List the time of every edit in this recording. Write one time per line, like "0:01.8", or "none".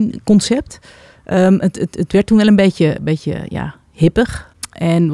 none